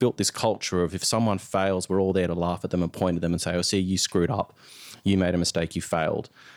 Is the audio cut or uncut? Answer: uncut